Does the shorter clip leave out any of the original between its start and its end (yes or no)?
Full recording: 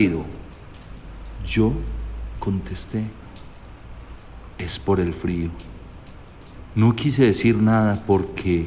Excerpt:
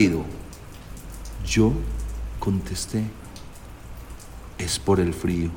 no